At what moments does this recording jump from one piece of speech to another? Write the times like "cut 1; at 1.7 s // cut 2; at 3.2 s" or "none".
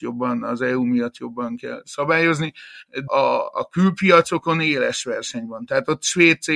cut 1; at 3.1 s